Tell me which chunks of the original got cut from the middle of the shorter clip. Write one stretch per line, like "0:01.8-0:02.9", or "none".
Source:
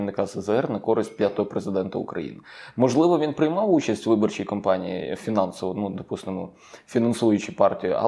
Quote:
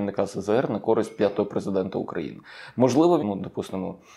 0:03.2-0:05.7